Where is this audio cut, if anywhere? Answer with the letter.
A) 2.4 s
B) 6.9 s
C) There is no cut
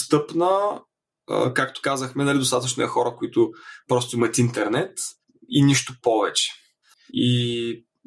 B